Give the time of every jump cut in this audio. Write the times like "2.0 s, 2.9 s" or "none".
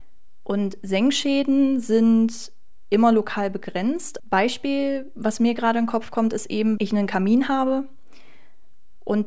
4.2 s, 6.8 s